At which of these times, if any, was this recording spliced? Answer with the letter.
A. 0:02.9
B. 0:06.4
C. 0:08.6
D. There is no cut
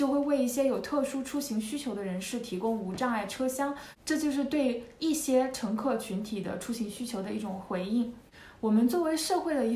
D